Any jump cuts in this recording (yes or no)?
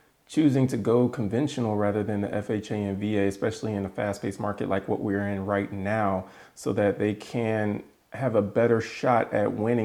no